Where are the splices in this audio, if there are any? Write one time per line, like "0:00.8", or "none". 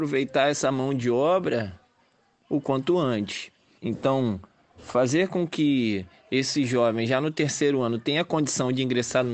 0:03.8

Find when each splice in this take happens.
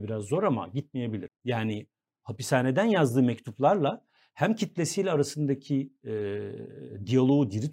0:01.3

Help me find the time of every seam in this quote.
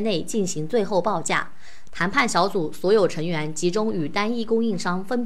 0:01.9

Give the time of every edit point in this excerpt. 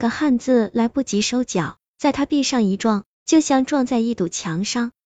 none

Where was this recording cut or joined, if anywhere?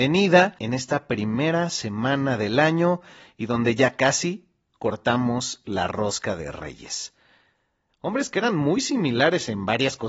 0:07.9

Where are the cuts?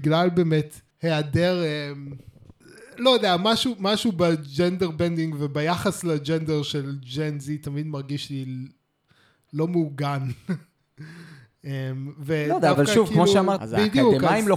0:00.9
0:13.6

